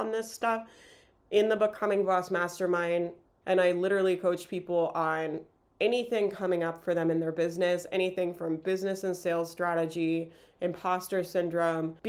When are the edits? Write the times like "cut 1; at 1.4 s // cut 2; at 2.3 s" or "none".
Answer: cut 1; at 3.4 s